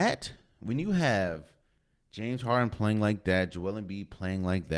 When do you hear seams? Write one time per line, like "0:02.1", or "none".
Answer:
none